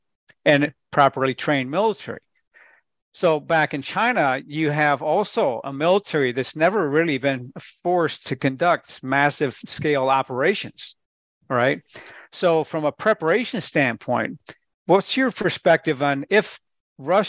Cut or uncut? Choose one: uncut